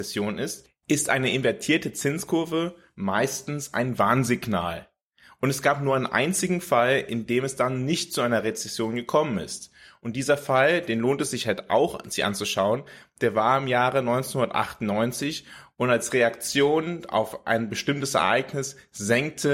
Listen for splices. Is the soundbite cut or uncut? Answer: uncut